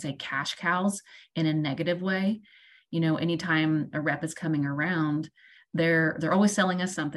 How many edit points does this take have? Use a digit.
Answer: 0